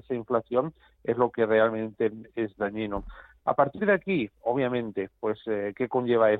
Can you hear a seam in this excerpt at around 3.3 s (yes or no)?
no